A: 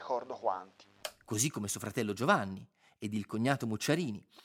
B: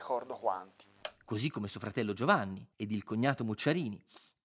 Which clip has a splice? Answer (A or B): B